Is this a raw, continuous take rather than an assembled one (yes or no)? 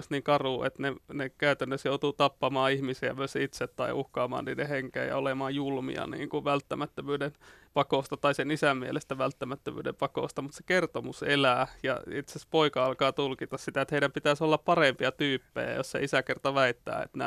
yes